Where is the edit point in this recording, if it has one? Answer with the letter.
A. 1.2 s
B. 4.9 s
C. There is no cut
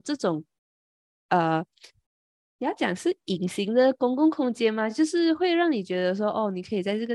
C